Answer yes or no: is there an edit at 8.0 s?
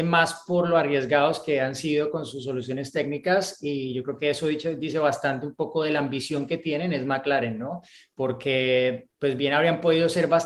no